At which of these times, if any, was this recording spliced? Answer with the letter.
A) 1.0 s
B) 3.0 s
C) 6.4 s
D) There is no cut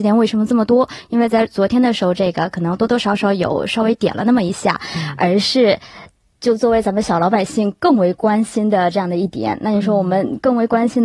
D